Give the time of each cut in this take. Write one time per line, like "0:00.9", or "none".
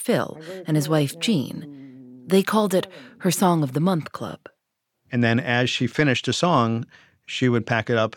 none